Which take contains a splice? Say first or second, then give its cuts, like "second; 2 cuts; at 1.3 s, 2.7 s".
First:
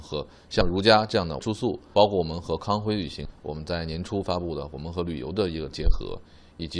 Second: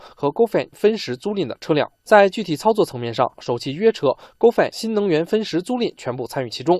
second; 2 cuts; at 2.0 s, 3.3 s